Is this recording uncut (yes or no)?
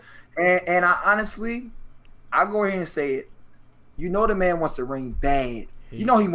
no